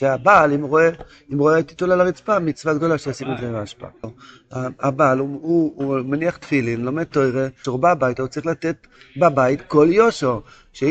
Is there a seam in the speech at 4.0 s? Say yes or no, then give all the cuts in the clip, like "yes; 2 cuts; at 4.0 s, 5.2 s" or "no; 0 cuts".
yes; 2 cuts; at 4.0 s, 7.6 s